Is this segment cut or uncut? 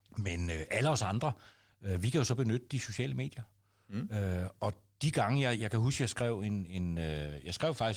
uncut